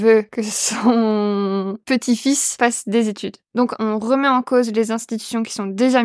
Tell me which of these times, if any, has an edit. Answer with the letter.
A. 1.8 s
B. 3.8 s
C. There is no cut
B